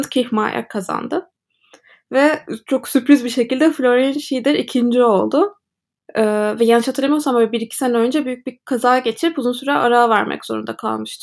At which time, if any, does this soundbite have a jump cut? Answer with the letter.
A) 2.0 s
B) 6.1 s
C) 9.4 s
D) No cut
B